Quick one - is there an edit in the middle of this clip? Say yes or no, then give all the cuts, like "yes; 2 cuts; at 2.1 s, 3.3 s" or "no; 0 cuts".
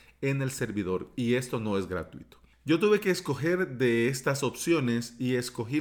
no; 0 cuts